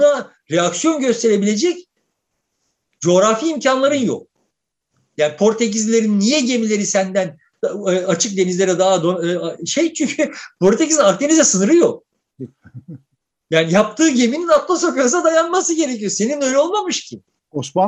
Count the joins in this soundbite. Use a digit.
0